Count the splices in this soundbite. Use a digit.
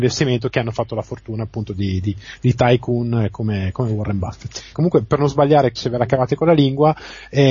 2